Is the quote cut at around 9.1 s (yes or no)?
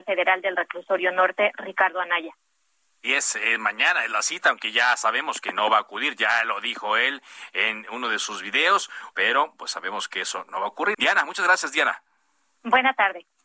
yes